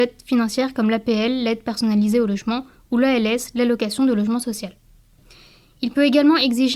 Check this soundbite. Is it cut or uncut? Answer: uncut